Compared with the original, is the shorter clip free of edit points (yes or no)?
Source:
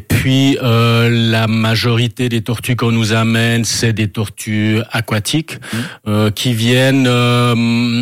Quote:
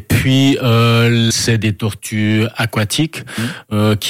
no